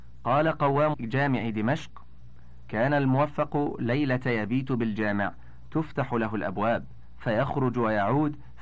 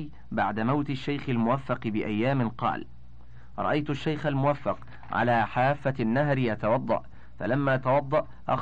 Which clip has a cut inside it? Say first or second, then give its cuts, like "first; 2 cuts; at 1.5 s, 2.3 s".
first; 1 cut; at 0.9 s